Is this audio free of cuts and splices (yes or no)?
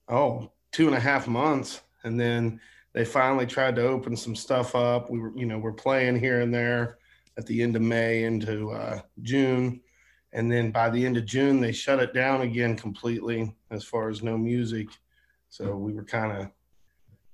yes